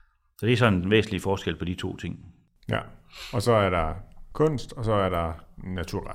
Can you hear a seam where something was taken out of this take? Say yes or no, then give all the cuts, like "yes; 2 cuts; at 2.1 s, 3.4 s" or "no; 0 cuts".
no; 0 cuts